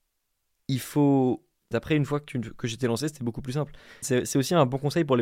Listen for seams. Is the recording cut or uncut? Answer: cut